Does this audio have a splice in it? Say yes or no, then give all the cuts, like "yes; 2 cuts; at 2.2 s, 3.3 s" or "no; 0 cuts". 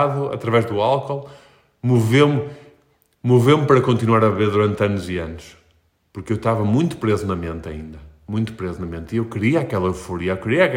no; 0 cuts